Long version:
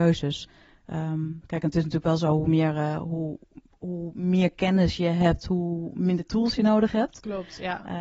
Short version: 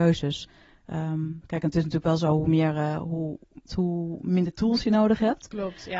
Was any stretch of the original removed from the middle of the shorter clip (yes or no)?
yes